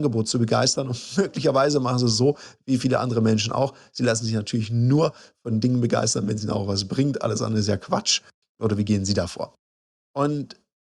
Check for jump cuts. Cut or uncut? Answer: uncut